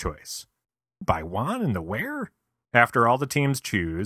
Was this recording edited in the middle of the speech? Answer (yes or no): yes